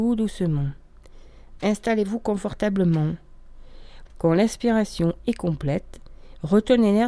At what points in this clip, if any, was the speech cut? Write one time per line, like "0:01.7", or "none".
0:01.6
0:04.1